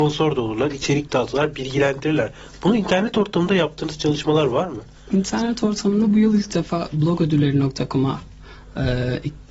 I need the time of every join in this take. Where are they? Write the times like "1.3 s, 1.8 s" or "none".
none

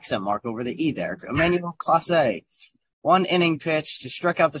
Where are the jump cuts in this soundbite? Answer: none

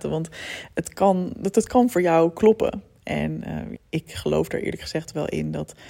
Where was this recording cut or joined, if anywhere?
3.8 s

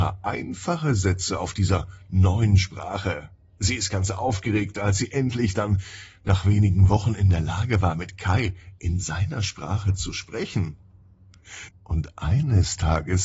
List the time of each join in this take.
11.7 s

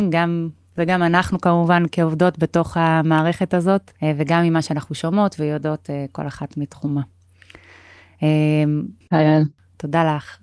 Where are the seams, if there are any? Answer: 4.0 s, 9.0 s

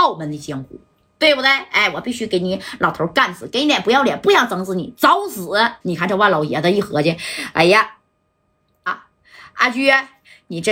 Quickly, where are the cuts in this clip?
5.8 s, 8.9 s

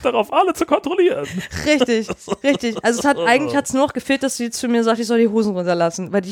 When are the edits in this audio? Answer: none

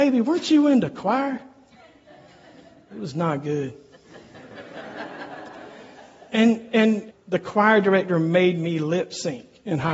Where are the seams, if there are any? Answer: 7.1 s

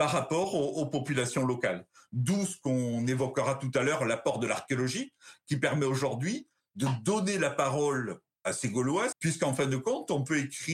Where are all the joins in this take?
9.1 s

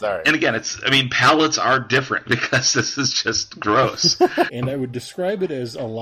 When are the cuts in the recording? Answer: 2.2 s, 4.5 s

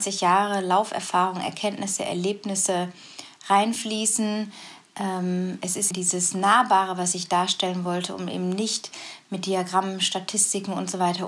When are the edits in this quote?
5.9 s

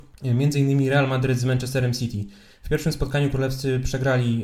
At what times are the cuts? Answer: none

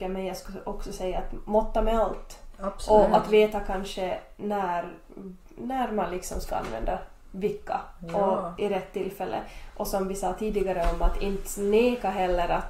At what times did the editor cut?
none

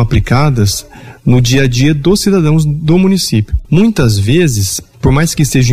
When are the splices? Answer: 3.6 s

